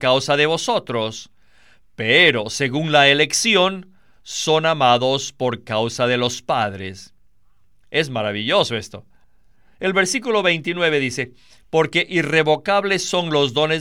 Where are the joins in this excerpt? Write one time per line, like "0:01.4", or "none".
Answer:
none